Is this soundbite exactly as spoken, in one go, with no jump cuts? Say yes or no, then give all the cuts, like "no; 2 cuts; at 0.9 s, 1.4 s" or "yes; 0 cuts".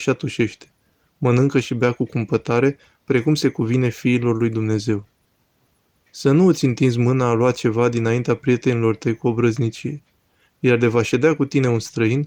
yes; 0 cuts